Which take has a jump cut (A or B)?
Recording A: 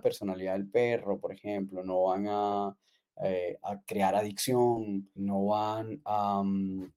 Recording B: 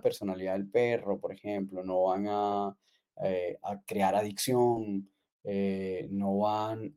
A